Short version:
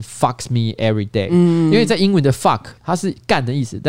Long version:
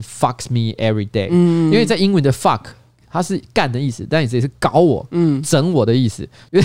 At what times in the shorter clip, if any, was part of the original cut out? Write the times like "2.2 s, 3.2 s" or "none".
2.8 s